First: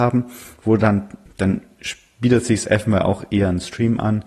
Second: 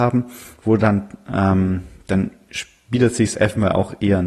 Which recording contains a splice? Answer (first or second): first